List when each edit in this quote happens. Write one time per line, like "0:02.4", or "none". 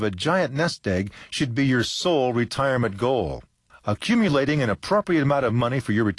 0:03.7